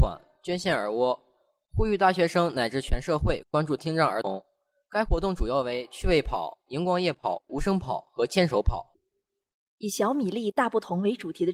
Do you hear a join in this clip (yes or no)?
no